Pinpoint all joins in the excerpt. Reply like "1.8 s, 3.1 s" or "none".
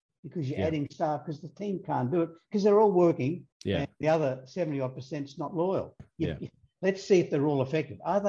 3.5 s, 6.0 s